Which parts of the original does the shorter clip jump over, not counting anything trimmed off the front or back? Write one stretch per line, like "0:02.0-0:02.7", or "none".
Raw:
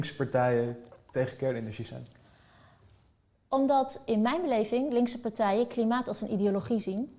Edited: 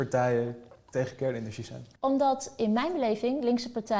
0:02.2-0:03.4